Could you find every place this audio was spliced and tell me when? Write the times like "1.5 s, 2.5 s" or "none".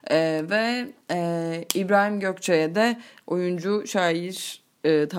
none